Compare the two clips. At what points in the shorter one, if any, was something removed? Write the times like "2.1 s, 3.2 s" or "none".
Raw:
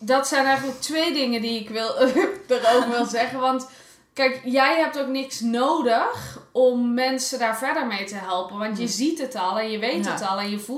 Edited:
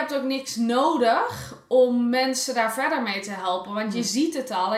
none

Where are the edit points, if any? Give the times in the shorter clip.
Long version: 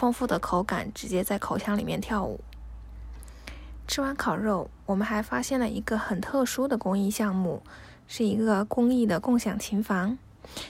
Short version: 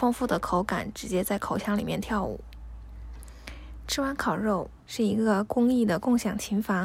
4.8 s

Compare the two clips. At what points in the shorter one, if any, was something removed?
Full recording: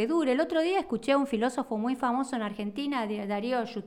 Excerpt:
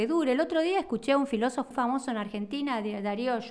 1.7 s

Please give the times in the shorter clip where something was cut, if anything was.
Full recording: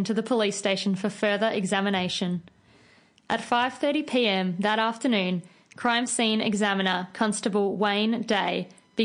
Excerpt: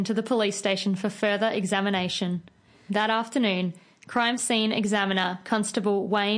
2.9 s

